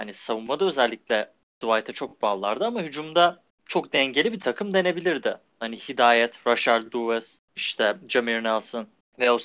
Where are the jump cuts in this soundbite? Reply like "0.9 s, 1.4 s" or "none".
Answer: none